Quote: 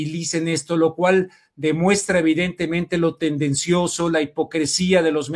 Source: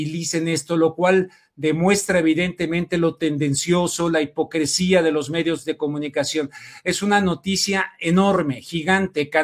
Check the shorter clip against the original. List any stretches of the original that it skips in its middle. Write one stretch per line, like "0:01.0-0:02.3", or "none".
none